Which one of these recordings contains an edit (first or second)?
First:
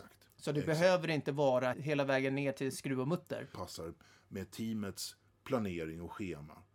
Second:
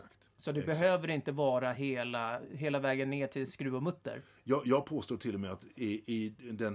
first